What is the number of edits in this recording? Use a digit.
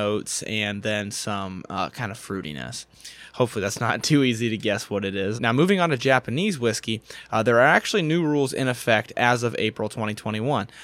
1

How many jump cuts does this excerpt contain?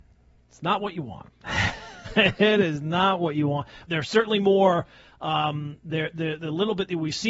1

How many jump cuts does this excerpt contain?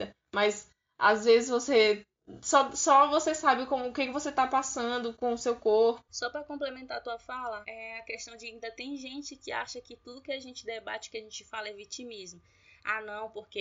2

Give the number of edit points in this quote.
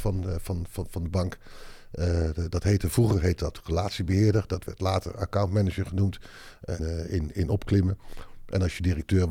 1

